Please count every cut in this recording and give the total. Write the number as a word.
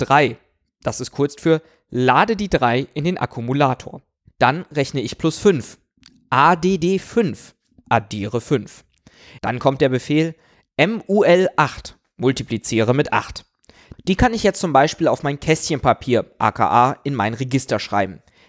two